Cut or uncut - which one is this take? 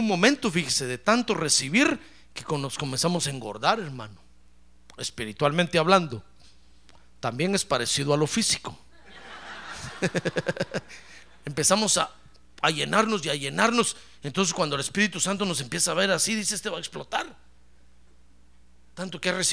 uncut